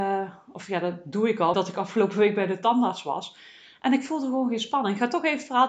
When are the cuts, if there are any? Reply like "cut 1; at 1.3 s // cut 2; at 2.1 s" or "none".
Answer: cut 1; at 1.5 s